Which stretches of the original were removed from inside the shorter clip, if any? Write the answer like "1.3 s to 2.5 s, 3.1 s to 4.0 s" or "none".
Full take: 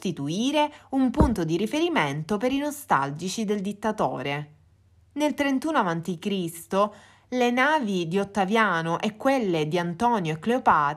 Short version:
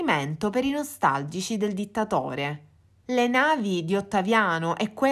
4.9 s to 7.3 s